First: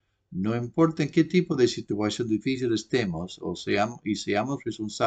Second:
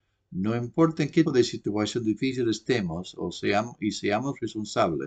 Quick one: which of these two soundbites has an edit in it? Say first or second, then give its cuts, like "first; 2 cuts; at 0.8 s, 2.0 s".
second; 1 cut; at 1.2 s